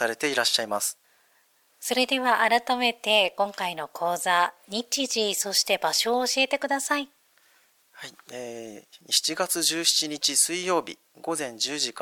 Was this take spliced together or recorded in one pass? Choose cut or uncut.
uncut